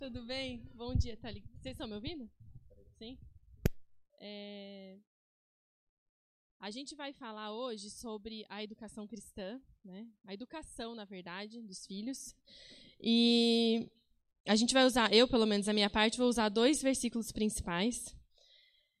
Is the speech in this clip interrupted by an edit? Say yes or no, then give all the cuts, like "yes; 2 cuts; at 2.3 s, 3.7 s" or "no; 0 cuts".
no; 0 cuts